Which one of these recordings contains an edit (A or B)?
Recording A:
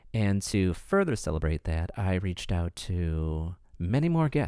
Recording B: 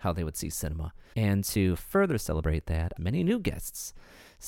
B